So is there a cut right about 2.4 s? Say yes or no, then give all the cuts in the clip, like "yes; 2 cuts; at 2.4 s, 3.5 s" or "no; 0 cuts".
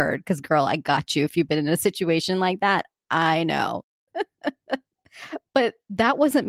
no; 1 cut; at 4.1 s